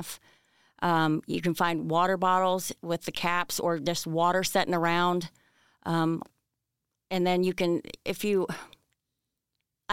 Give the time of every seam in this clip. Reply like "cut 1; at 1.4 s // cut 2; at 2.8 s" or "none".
none

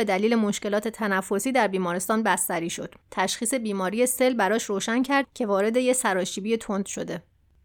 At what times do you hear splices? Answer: cut 1; at 3.0 s

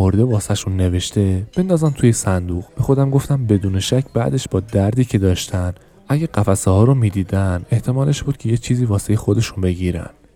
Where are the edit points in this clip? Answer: cut 1; at 2.7 s

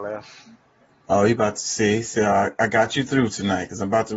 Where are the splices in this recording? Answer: none

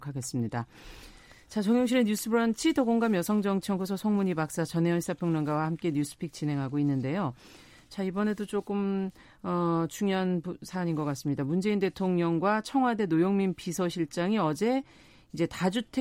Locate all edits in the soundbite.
none

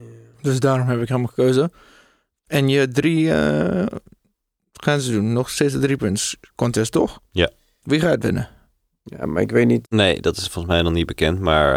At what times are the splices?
cut 1; at 9.8 s

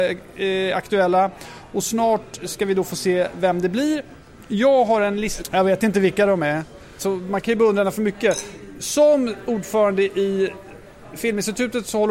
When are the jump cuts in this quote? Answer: cut 1; at 5.4 s // cut 2; at 7.0 s

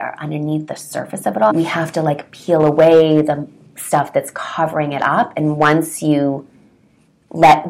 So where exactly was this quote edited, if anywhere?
cut 1; at 1.5 s

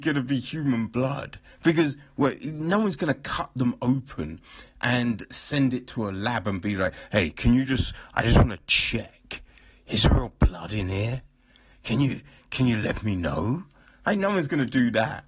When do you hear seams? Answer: none

